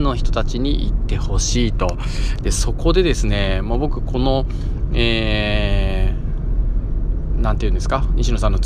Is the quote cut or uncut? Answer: uncut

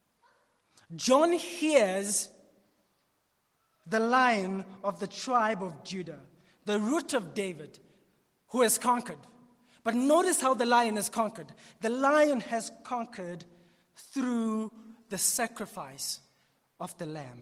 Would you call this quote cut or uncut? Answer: uncut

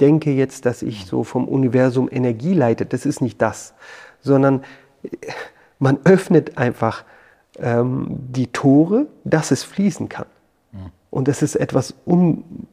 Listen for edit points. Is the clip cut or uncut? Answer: uncut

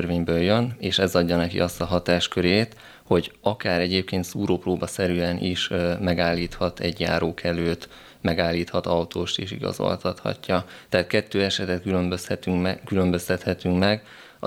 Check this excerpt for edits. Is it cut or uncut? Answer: uncut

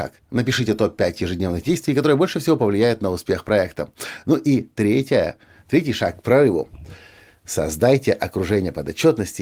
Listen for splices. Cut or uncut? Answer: uncut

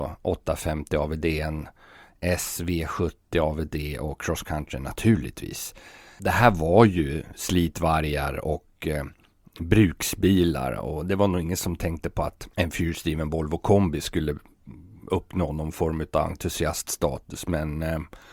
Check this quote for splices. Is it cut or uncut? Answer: uncut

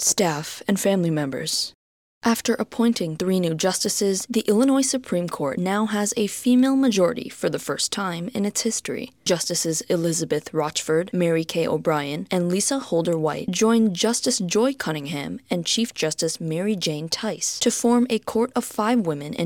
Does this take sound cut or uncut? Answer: uncut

